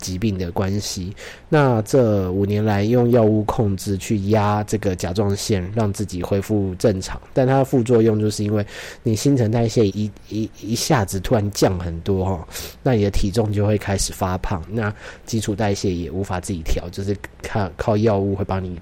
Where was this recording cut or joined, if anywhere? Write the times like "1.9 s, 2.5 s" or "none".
9.9 s, 14.7 s